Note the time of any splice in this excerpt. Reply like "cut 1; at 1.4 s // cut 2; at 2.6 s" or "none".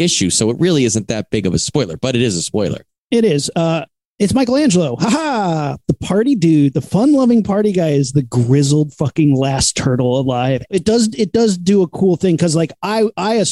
cut 1; at 10.7 s